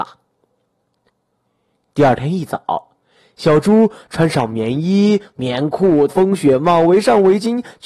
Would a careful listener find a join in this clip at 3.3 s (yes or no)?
no